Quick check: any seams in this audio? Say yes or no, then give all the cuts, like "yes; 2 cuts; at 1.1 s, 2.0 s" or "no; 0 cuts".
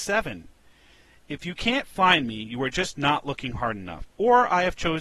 no; 0 cuts